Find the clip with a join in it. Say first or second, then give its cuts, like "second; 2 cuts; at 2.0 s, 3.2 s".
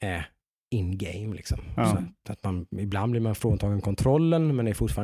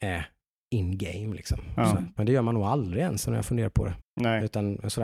second; 2 cuts; at 2.2 s, 4.0 s